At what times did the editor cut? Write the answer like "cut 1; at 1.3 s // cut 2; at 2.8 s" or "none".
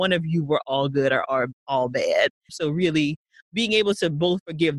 cut 1; at 2.5 s